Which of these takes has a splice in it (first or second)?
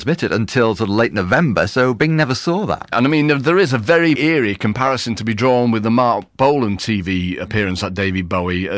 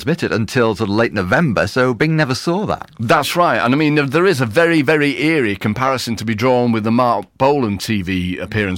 first